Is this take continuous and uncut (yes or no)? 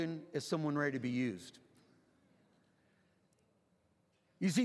yes